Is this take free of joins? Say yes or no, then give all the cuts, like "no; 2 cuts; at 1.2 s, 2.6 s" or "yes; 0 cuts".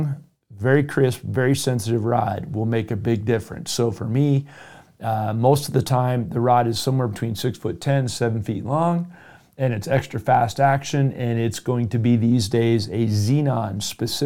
yes; 0 cuts